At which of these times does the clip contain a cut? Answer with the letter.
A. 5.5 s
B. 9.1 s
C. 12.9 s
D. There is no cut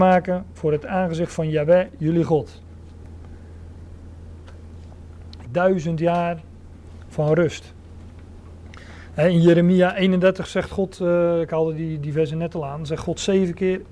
A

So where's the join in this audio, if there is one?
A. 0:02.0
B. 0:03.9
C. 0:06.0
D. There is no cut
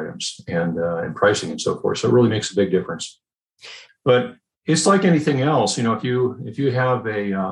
B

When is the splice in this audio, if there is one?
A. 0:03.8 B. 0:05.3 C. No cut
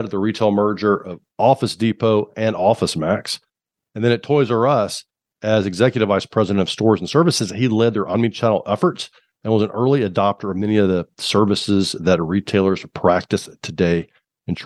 C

